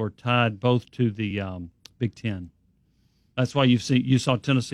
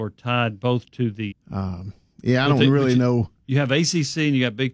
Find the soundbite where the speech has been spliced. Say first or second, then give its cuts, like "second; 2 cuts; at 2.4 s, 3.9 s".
second; 1 cut; at 1.3 s